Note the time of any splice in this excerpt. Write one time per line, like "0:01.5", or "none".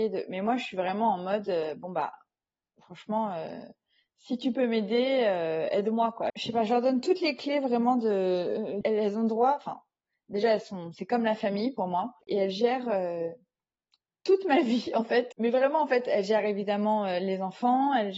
0:06.3
0:08.8
0:15.3